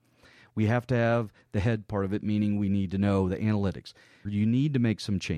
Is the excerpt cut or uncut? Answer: cut